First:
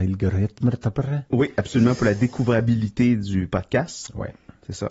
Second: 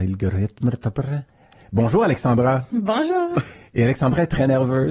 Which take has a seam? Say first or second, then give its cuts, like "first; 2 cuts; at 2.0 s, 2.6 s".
second; 1 cut; at 1.3 s